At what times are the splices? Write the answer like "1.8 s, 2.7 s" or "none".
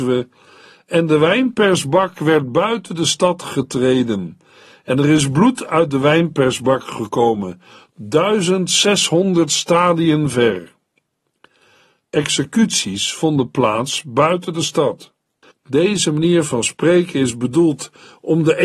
7.9 s, 15.5 s